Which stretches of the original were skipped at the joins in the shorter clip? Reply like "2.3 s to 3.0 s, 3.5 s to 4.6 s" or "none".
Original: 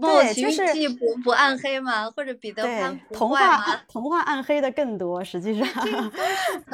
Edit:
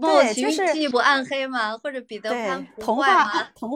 0.9 s to 1.2 s

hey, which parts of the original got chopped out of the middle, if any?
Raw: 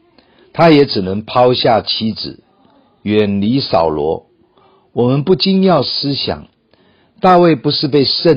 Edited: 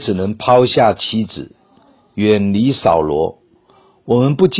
none

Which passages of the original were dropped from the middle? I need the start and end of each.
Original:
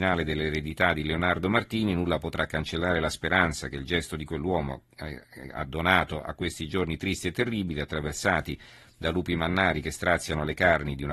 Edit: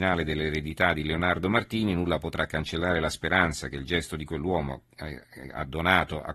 none

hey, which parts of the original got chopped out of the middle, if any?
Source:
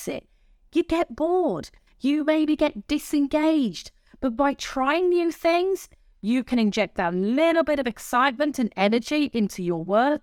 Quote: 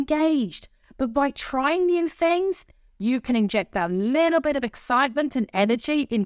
none

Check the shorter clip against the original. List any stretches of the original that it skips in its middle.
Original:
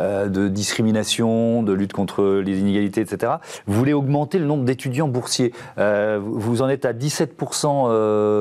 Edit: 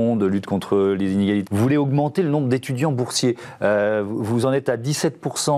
2.9 s to 3.6 s

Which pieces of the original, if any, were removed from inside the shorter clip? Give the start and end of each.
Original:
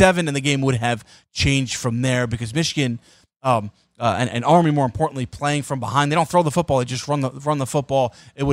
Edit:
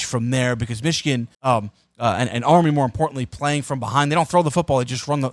3.1 s to 3.3 s

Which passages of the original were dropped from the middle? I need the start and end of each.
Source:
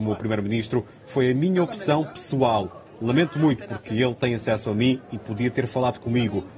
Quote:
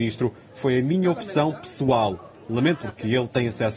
3.3 s to 3.7 s

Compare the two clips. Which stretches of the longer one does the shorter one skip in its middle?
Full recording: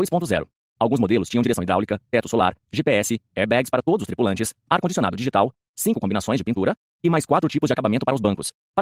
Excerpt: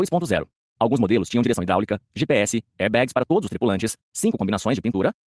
2.0 s to 2.6 s, 4.6 s to 5.6 s

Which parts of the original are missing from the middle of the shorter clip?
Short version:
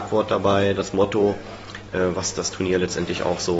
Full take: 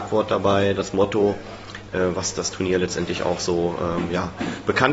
none

